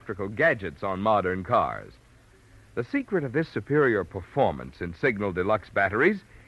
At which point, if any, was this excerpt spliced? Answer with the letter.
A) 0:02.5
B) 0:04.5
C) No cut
C